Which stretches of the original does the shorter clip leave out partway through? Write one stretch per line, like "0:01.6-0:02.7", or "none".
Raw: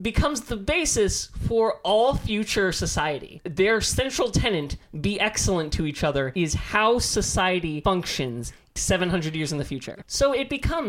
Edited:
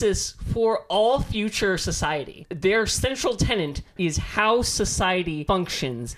0:04.9-0:06.3